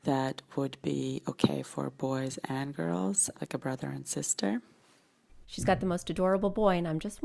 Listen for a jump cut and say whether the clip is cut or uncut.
cut